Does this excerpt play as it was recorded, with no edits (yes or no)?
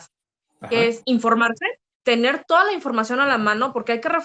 yes